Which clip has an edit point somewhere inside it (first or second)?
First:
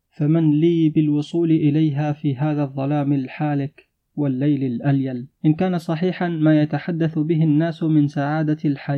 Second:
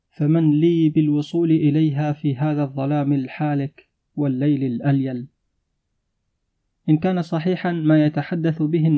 first